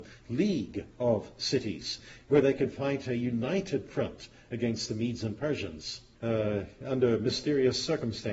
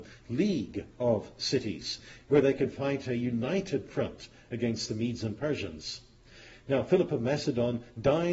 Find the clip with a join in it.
first; 1 cut; at 6.1 s

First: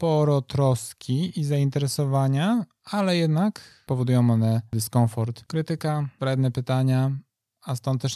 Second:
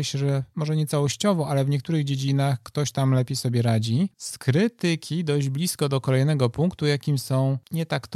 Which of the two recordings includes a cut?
second; 1 cut; at 4.1 s

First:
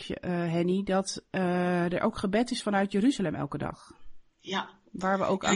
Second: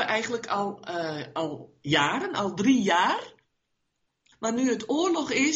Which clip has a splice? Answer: second; 1 cut; at 4.3 s

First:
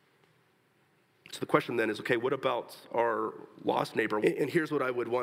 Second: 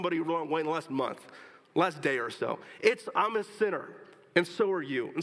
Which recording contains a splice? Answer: first; 1 cut; at 4.2 s

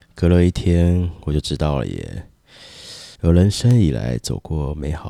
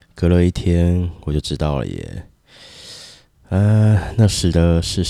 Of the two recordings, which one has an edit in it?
first; 1 cut; at 3.2 s

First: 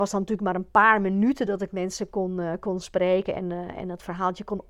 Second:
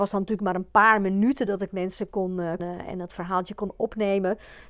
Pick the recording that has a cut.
second; 1 cut; at 2.6 s

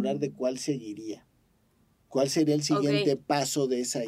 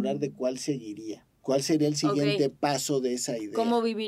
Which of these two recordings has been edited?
second; 1 cut; at 1.3 s

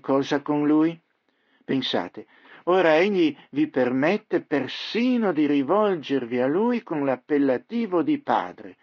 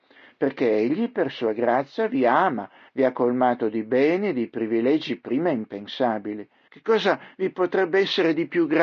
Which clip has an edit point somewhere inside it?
second; 2 cuts; at 2.9 s, 6.7 s

